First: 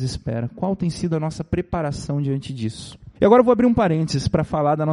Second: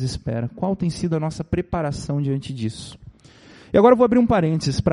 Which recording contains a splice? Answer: first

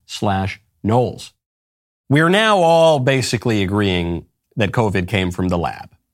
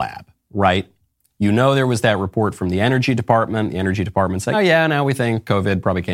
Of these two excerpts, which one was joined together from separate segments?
second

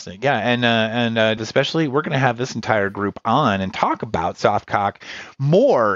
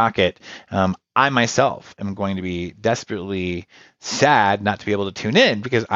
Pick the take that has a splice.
first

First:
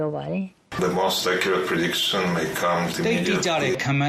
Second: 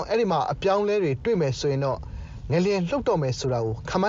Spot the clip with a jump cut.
first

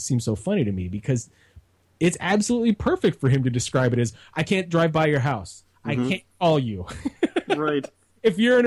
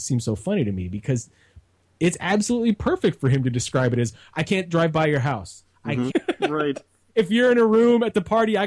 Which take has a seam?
second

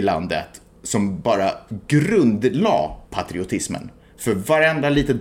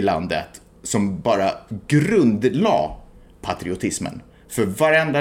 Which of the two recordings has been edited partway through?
first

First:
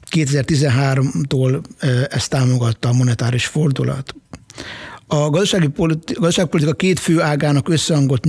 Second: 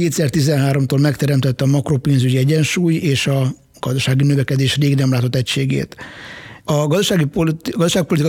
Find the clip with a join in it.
second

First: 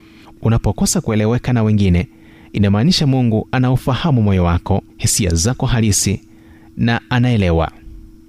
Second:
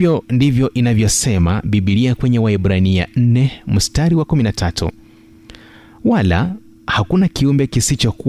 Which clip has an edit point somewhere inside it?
first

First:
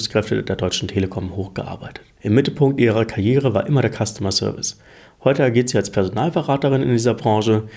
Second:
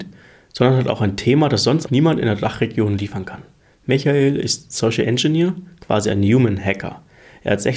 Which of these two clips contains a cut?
second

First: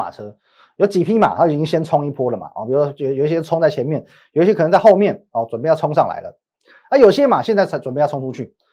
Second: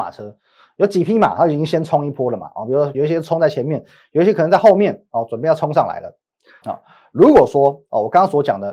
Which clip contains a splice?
second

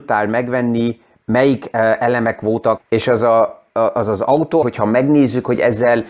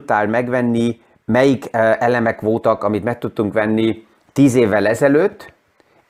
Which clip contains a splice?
first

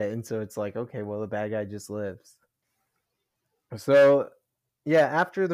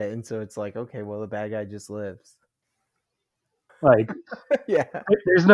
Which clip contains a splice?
second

